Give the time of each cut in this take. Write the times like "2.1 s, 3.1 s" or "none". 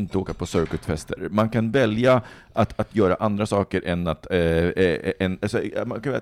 none